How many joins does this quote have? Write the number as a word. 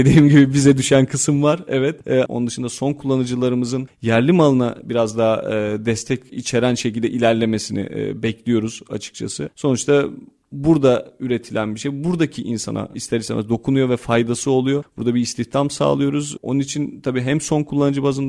one